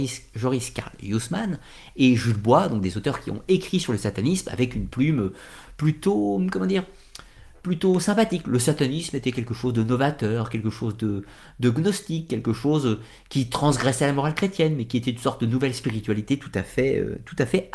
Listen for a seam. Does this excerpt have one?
no; 0 cuts

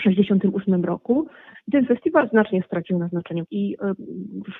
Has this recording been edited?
yes; 2 cuts; at 1.5 s, 3.4 s

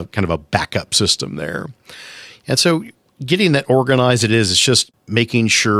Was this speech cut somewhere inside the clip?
no; 0 cuts

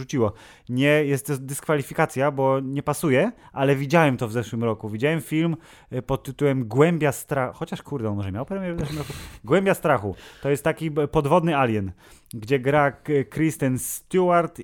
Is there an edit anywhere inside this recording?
no; 0 cuts

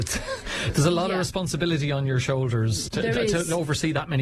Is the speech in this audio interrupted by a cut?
no; 0 cuts

